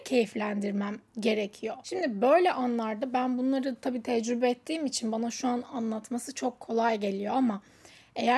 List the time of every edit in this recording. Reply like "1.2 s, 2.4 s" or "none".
1.1 s